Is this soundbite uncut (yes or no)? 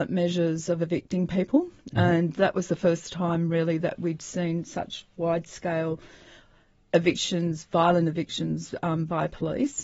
yes